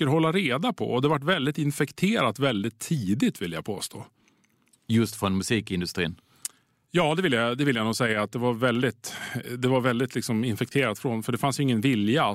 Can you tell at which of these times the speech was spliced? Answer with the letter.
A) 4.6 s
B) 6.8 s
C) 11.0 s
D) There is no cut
D